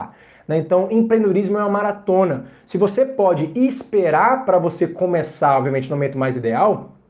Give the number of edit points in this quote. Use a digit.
0